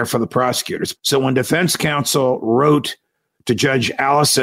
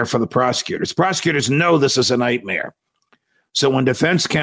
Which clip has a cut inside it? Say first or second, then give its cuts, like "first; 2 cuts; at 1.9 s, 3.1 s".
first; 1 cut; at 0.9 s